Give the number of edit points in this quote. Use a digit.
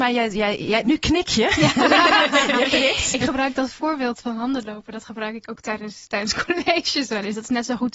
0